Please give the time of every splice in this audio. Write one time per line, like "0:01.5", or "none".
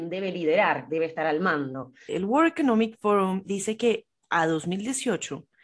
0:02.1
0:03.4